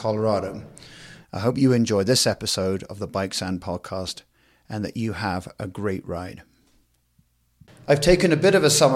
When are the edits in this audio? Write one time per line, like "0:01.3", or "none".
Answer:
0:01.2

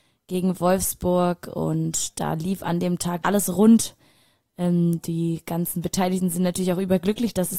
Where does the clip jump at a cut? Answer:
0:03.2

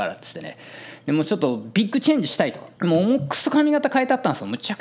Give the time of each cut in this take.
0:02.8

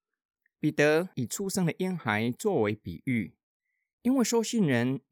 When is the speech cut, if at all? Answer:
none

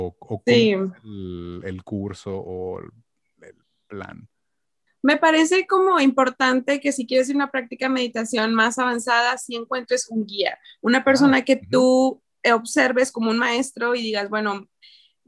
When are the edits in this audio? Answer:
none

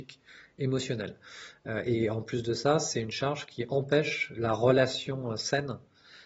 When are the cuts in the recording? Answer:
none

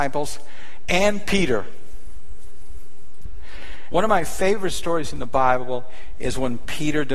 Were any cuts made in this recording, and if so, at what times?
0:03.9

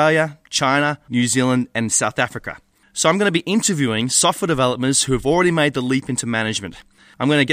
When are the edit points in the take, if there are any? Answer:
0:01.1
0:02.8

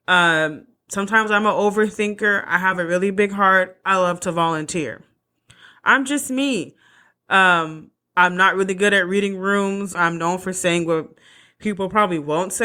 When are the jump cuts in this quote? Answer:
0:09.9

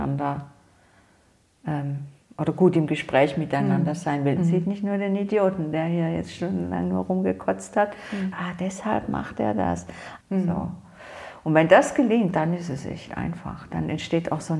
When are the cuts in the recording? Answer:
0:04.4
0:08.3
0:10.2

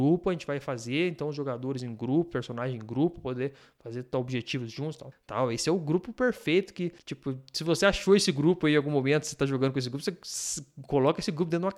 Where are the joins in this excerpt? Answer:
0:05.1

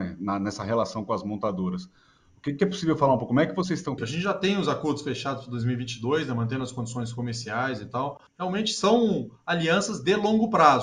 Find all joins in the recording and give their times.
0:04.0
0:08.3

